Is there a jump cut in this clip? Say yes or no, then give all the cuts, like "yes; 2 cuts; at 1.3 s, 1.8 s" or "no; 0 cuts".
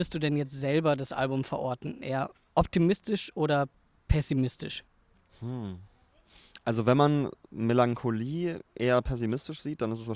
no; 0 cuts